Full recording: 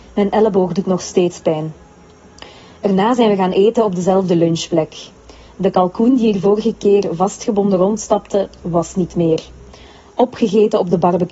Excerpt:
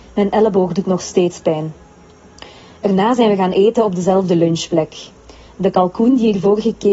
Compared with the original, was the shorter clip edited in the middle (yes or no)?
no